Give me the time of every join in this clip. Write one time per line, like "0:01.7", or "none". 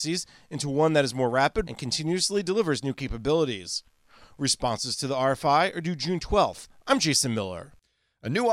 0:01.6